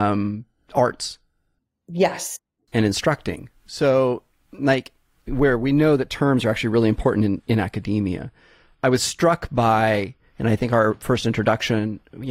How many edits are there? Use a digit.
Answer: 0